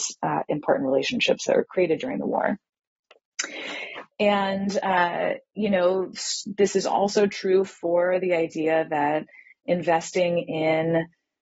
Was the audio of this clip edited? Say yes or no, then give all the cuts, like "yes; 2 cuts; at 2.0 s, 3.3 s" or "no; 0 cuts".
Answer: no; 0 cuts